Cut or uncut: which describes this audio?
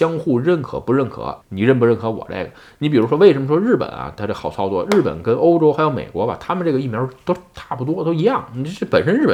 cut